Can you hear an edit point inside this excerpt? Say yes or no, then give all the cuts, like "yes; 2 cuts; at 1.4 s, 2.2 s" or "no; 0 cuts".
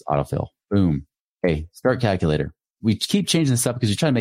no; 0 cuts